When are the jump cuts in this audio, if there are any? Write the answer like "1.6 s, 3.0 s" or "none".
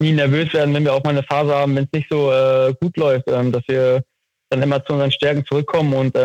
none